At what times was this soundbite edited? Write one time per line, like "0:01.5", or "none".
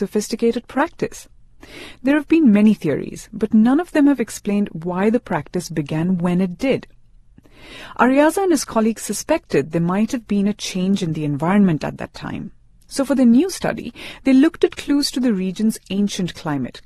none